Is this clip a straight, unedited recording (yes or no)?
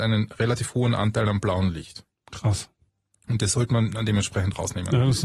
yes